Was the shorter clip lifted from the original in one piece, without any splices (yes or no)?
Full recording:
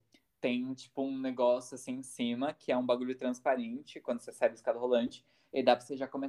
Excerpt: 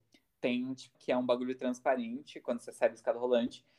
no